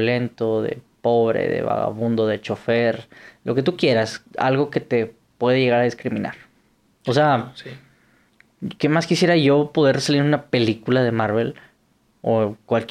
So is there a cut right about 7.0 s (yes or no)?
yes